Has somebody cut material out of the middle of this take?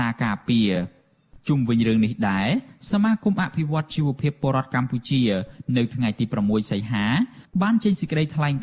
no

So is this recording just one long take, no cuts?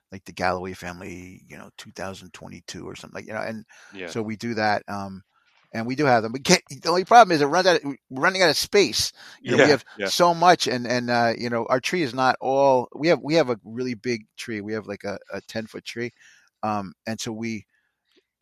yes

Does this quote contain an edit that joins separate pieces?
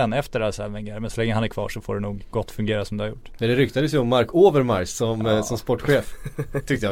no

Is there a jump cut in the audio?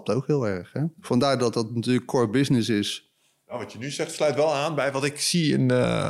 yes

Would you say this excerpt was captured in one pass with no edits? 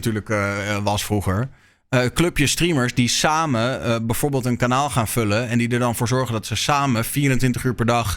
yes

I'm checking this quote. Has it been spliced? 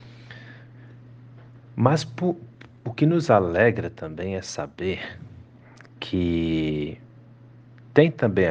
no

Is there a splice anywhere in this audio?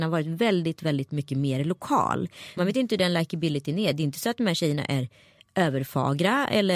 yes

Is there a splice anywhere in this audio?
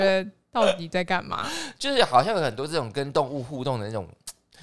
yes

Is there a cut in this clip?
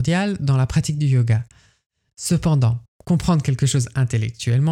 no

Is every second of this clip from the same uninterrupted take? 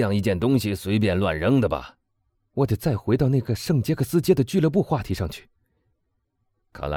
no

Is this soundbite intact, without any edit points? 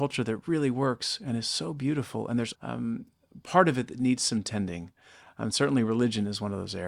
no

